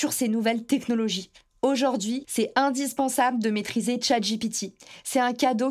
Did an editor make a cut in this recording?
yes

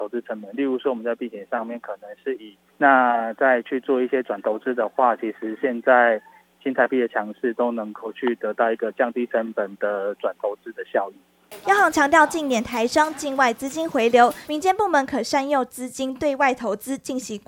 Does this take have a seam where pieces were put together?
yes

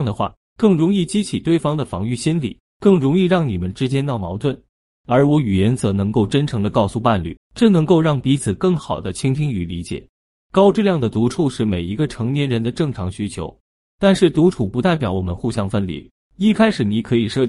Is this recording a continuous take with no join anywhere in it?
no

